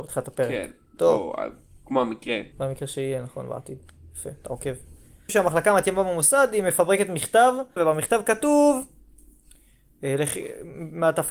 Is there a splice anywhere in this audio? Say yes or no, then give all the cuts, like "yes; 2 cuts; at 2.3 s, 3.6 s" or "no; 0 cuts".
yes; 3 cuts; at 2.5 s, 5.3 s, 7.8 s